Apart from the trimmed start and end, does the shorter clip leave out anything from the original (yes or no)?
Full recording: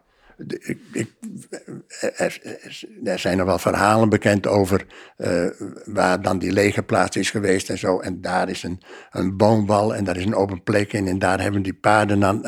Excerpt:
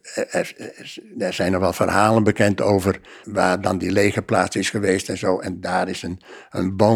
yes